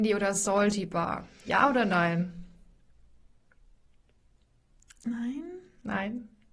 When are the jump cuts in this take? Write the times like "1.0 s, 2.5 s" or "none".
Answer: none